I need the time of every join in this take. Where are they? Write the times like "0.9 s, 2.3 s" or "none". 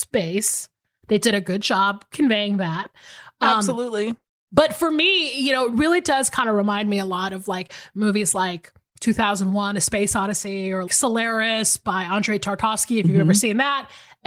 10.9 s

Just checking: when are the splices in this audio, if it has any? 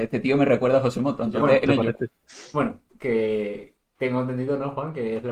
1.7 s, 2.9 s

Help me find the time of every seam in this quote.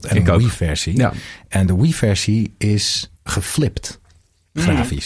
3.2 s

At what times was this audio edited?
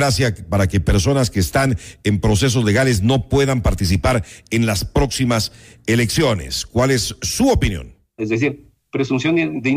8.2 s

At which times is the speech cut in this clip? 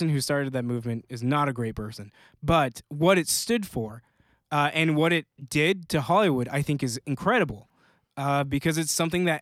none

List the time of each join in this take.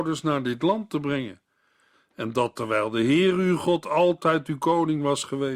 1.9 s

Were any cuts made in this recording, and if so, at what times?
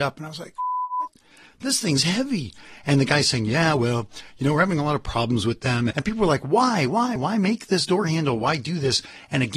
5.9 s, 7.2 s

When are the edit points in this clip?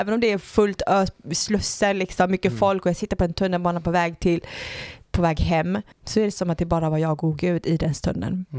5.9 s

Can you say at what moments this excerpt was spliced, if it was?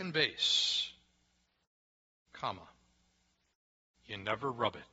none

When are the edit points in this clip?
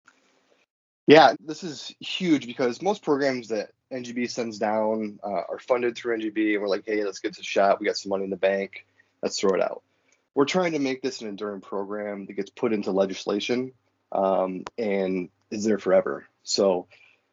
1.3 s

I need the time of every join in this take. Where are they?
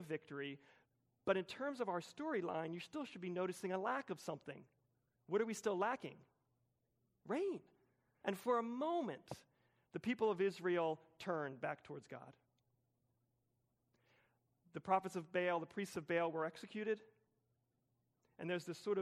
8.2 s

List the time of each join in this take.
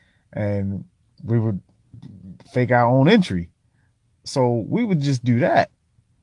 4.1 s

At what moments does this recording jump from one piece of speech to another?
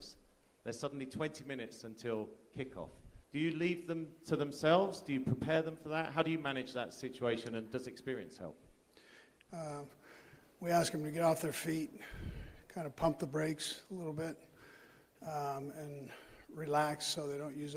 3.2 s, 9.5 s

